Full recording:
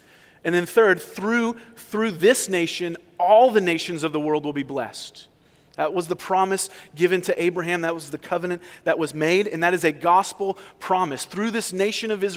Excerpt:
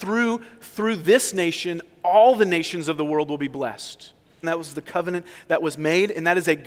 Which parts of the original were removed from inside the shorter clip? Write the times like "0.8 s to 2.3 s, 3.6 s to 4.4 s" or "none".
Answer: 5.6 s to 7.8 s